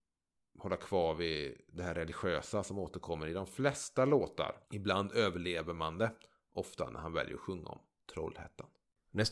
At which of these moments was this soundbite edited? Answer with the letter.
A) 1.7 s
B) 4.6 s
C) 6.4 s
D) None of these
B